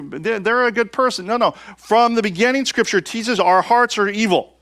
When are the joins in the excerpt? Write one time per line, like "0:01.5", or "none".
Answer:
none